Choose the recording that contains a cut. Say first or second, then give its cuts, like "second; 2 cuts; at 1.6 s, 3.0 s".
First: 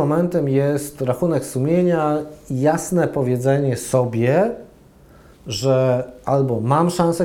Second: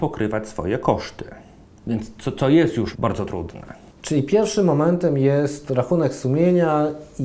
second; 1 cut; at 2.9 s